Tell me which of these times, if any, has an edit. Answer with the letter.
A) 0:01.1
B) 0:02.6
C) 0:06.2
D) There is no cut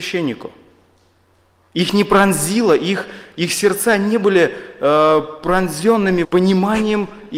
C